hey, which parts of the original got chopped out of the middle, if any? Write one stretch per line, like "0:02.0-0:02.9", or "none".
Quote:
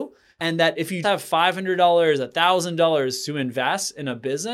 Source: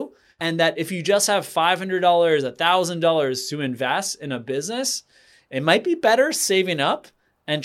0:01.0-0:01.3